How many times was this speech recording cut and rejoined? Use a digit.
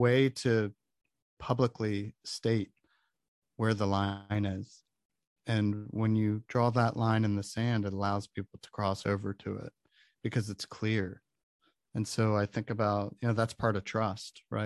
0